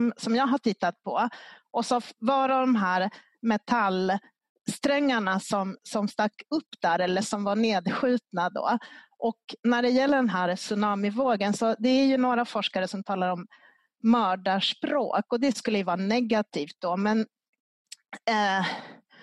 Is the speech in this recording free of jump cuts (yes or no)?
no